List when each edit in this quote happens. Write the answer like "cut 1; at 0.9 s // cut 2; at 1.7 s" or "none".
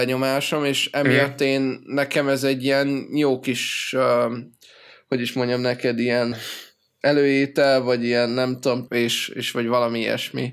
cut 1; at 6.3 s // cut 2; at 8.9 s